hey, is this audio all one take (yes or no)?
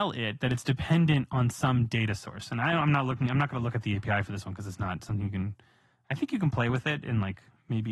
yes